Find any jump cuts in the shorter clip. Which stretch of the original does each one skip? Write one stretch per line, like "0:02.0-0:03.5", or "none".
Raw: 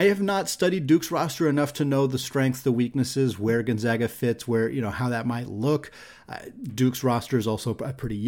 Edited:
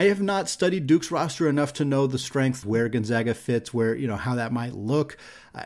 0:02.6-0:03.4

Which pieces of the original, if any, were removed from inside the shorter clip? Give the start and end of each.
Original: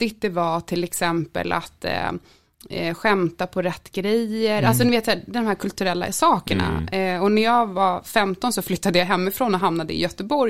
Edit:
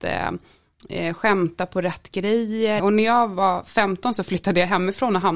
0:04.6-0:07.2

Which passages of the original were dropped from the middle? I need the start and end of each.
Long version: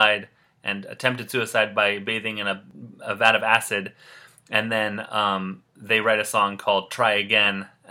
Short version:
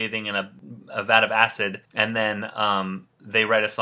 0:04.0-0:04.4

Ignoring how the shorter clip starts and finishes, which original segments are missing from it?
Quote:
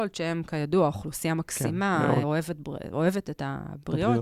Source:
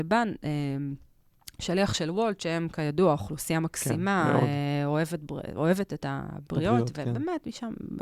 0:04.5-0:04.9

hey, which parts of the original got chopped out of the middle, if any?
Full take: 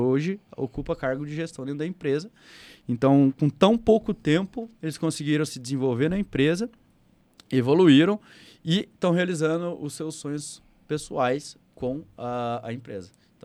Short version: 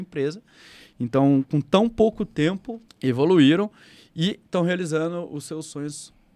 0:04.8-0:07.4

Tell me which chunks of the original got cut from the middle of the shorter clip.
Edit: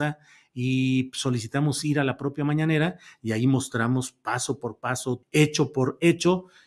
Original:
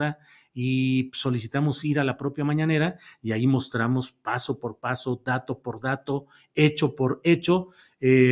0:05.2-0:06.5

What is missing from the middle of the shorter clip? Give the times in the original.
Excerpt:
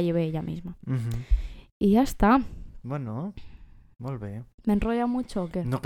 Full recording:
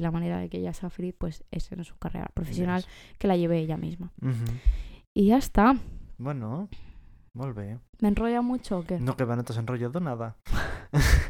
none

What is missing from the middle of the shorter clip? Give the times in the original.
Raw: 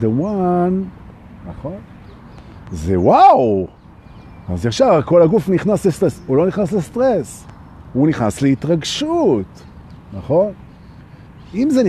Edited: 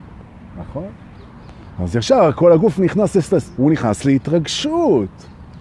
0:02.6-0:04.4
0:06.2-0:07.9

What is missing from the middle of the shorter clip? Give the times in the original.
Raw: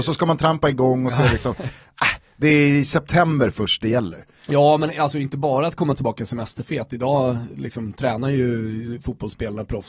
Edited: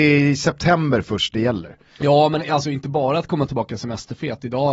none

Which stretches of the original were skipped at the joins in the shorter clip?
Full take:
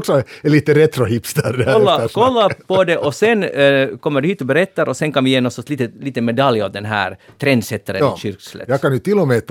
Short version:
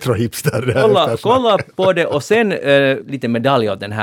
0:03.9-0:05.9

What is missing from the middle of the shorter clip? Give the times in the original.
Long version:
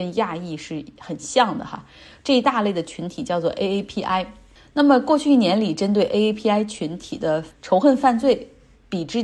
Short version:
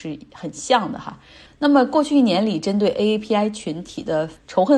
0:02.1-0:04.6

